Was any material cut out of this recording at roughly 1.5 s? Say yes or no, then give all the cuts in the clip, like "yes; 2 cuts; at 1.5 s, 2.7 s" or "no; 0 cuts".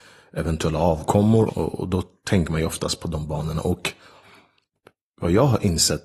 yes; 1 cut; at 1.5 s